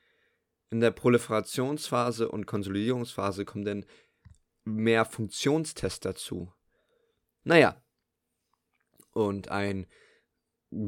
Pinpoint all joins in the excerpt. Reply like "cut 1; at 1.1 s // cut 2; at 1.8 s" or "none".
cut 1; at 7.4 s